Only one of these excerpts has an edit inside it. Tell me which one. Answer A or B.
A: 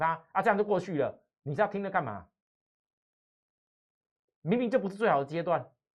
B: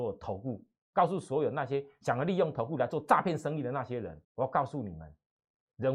B